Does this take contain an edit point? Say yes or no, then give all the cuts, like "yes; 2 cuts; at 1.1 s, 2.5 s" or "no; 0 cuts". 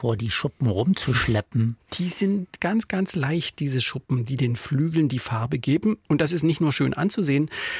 no; 0 cuts